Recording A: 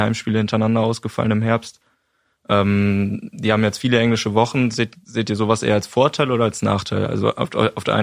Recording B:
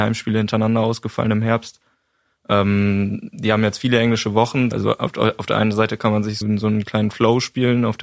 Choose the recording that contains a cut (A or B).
B